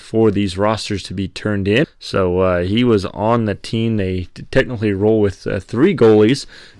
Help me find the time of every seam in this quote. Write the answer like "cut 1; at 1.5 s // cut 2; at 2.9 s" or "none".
cut 1; at 1.8 s